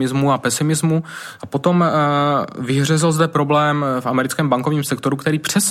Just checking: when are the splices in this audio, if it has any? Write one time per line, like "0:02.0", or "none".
0:01.4

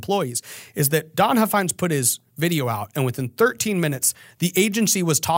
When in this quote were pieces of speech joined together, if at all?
none

